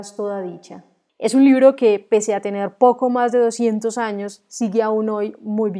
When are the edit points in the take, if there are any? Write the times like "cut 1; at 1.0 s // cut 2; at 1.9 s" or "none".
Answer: cut 1; at 1.1 s